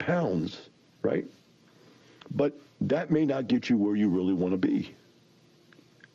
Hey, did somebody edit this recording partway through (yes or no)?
yes